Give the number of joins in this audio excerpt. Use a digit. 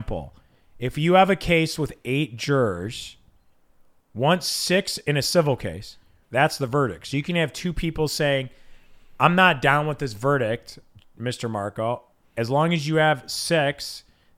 1